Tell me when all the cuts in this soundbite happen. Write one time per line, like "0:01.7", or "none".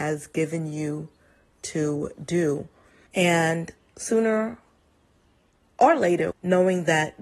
0:03.1
0:06.3